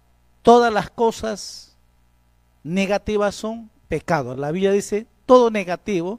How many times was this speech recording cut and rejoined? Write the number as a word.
zero